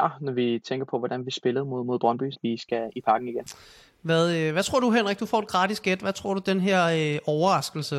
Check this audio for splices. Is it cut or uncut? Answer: cut